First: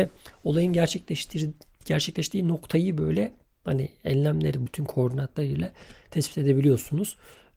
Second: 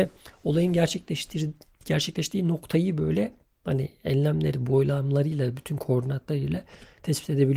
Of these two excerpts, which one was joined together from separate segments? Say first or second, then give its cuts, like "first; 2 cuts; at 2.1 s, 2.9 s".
first; 1 cut; at 4.7 s